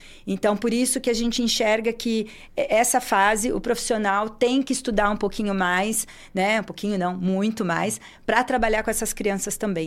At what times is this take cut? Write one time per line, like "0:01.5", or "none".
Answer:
none